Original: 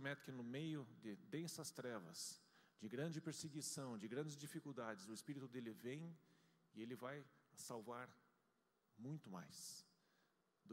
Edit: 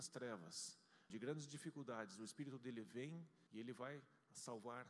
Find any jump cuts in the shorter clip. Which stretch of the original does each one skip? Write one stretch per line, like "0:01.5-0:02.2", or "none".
0:02.7-0:04.0
0:06.4-0:06.7

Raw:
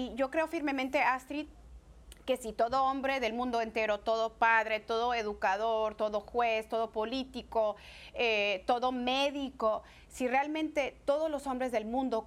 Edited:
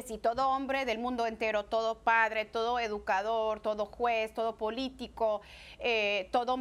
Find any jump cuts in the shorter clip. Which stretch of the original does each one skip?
none

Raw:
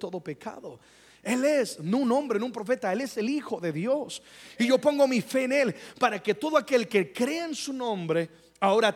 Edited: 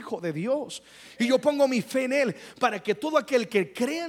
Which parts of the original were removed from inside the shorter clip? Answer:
none

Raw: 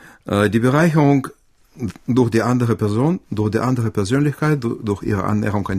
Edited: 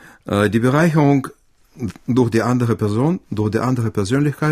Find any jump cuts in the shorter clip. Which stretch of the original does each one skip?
none

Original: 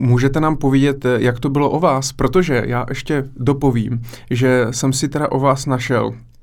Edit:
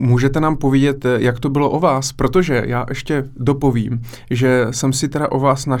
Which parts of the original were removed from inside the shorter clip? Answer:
none

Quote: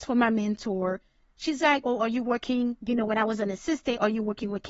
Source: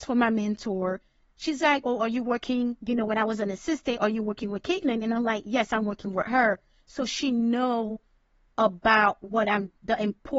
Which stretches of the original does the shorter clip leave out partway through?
none

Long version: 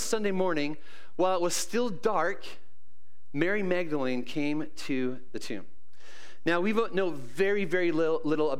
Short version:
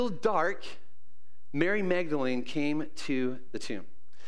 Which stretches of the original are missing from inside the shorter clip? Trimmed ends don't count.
none

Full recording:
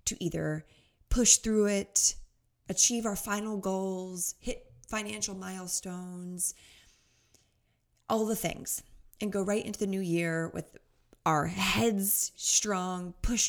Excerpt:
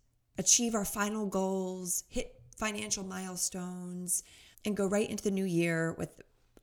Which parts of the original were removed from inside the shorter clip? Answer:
0:06.8-0:09.1

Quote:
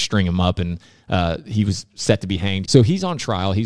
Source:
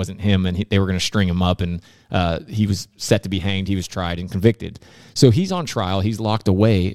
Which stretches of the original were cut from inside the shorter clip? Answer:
0:03.7-0:05.1

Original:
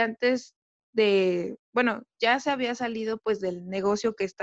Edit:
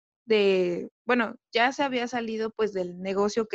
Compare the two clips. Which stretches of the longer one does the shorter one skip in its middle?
none

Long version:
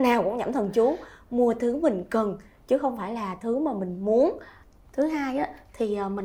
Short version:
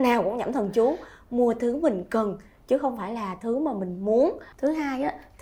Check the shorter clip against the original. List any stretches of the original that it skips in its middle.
0:04.5-0:04.9

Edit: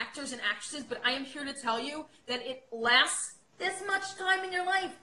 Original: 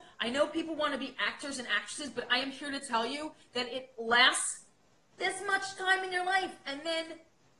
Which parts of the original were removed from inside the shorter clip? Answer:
0:04.7-0:05.1

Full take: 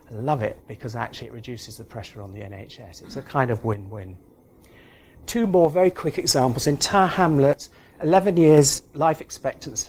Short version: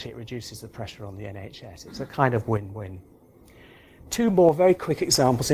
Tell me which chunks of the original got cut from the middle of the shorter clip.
none

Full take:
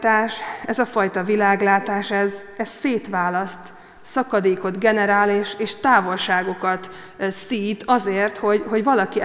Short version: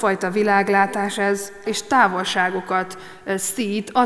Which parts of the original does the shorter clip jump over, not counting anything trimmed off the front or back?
0:02.6-0:05.6

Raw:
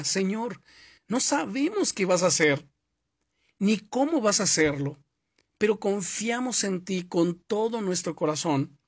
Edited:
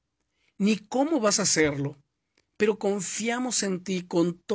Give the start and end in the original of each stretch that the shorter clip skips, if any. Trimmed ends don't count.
none

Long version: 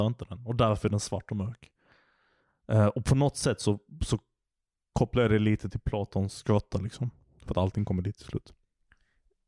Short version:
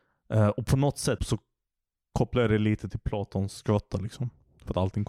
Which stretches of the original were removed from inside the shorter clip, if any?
0:03.6-0:04.0

